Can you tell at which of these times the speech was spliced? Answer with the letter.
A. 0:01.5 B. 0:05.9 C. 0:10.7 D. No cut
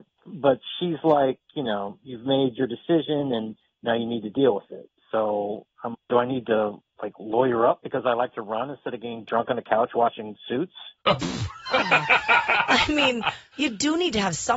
B